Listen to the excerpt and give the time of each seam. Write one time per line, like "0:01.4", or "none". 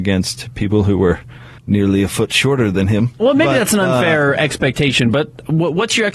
0:01.6